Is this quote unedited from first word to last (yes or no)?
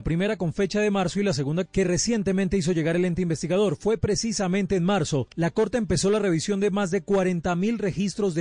no